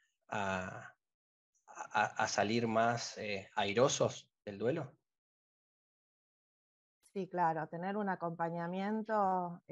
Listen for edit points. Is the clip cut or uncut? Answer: uncut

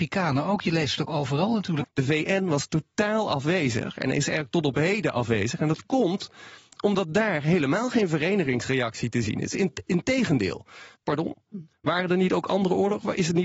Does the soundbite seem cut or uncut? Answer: cut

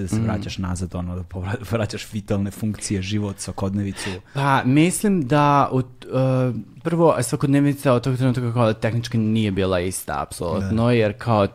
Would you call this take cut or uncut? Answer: uncut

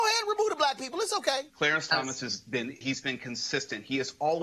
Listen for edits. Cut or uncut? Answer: cut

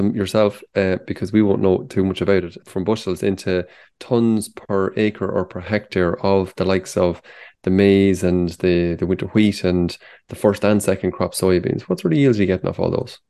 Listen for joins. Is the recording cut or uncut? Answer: cut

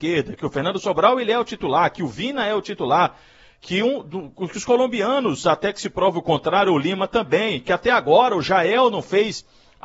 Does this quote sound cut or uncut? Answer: uncut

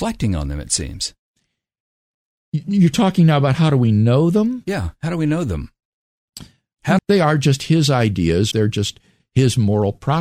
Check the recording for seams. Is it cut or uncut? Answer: cut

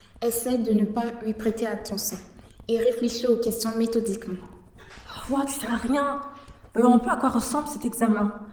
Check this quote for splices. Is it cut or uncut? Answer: cut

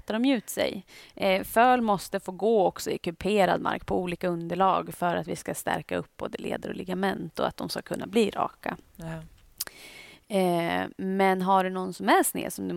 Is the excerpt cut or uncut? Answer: uncut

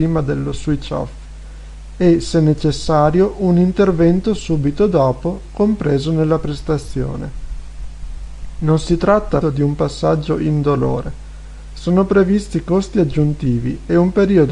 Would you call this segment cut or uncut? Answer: cut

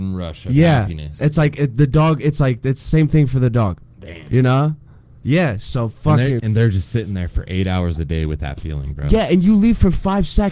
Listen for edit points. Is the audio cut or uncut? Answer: cut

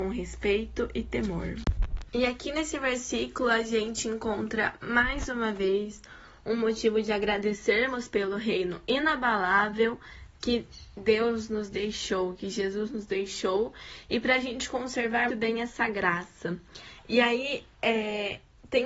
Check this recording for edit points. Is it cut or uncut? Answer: cut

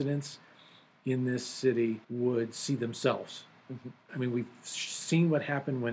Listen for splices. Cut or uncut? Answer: cut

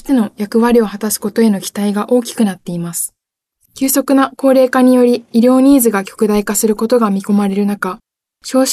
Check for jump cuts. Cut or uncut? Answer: cut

